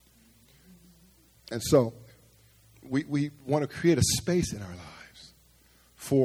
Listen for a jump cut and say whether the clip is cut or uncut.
cut